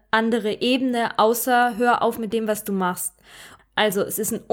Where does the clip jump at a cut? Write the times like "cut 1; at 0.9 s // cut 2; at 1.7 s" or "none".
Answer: cut 1; at 3.6 s